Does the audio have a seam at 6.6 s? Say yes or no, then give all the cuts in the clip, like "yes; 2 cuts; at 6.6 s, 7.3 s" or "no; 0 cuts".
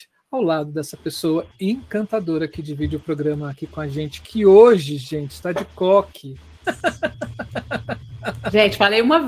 yes; 1 cut; at 6.6 s